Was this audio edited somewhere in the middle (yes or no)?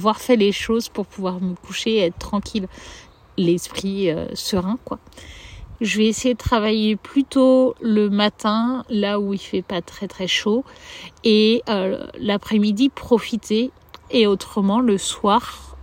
yes